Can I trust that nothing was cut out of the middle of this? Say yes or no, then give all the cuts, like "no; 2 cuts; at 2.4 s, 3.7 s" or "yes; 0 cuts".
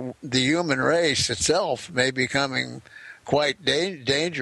no; 1 cut; at 3.2 s